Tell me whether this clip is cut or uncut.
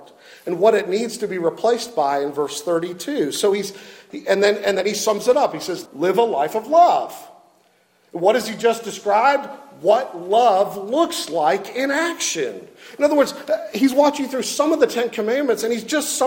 cut